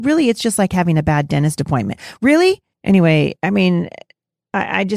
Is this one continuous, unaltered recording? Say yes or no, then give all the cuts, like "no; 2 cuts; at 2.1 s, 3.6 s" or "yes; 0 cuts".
no; 1 cut; at 2.7 s